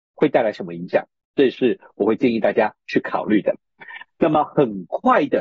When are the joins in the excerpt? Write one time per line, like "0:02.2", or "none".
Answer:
none